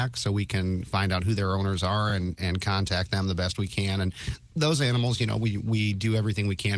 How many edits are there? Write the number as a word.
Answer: zero